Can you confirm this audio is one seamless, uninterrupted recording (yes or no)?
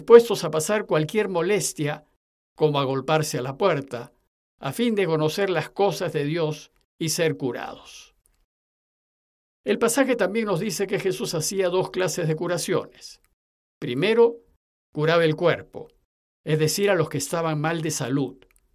yes